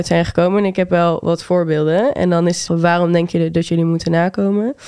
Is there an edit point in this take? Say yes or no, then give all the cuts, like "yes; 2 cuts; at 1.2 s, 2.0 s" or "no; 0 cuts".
yes; 1 cut; at 2.7 s